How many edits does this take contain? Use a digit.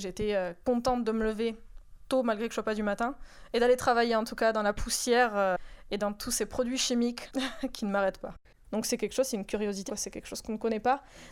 2